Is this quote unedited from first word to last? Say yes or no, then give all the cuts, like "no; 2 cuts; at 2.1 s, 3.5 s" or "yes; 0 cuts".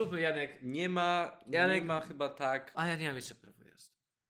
no; 1 cut; at 2.7 s